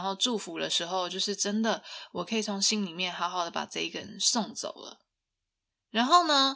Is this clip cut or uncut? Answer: uncut